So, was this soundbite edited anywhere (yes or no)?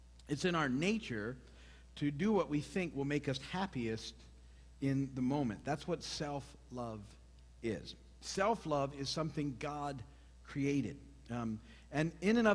no